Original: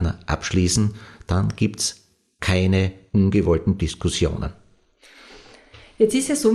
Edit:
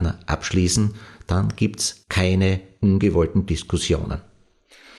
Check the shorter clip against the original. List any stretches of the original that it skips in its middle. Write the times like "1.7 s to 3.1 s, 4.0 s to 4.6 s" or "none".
2.0 s to 2.3 s

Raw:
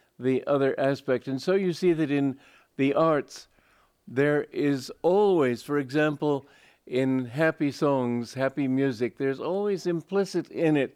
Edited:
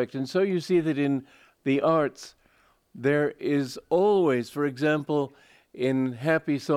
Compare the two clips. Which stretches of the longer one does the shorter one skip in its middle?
none

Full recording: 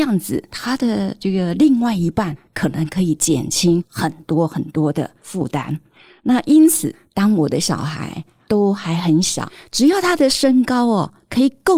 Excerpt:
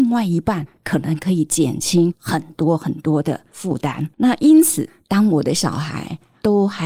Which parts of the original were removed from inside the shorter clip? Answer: 5.8 s to 6.2 s

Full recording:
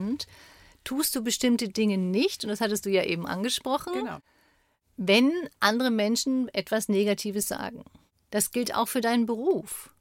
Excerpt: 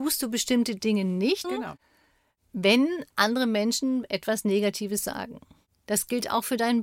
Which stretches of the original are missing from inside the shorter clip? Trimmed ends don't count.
2.4 s to 3.9 s

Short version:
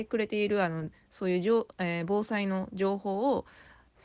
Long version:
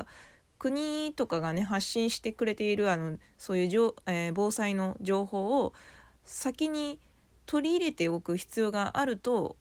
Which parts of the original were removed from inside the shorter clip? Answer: none

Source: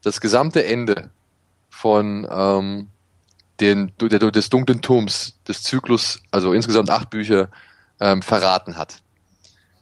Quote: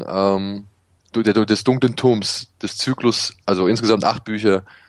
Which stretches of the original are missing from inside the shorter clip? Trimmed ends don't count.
3.3 s to 3.9 s

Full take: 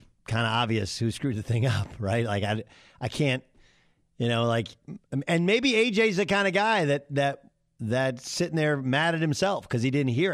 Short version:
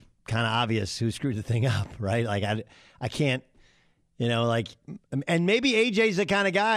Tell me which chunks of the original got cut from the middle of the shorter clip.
none

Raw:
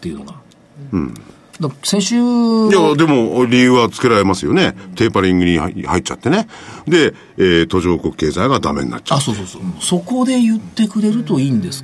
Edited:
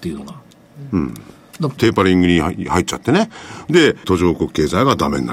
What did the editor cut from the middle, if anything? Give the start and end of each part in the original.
1.8 s to 4.9 s, 7.2 s to 7.7 s

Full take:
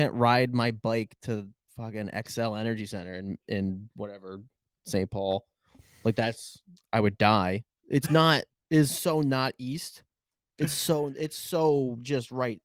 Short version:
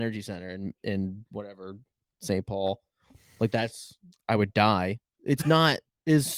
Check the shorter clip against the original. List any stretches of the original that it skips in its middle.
none

